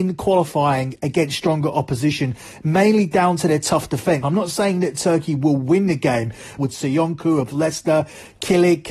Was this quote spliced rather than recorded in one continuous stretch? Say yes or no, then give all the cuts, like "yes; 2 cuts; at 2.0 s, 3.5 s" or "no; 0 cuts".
yes; 2 cuts; at 4.2 s, 6.6 s